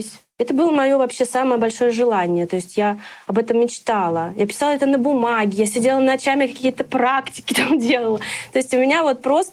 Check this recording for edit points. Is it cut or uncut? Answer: uncut